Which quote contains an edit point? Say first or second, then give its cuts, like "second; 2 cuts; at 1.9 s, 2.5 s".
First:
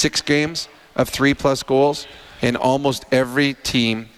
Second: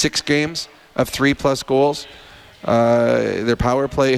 first; 1 cut; at 2.4 s